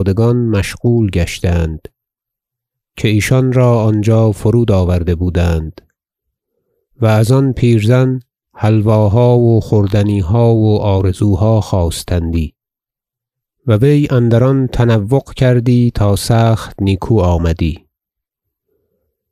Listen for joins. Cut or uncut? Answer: uncut